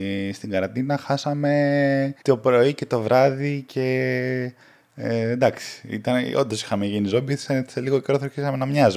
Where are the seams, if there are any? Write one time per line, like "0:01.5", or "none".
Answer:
0:02.2